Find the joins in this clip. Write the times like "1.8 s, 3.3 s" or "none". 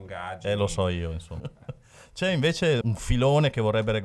1.4 s, 2.8 s